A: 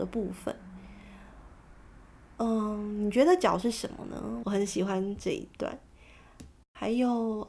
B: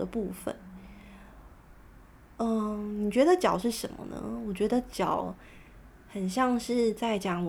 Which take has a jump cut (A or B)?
A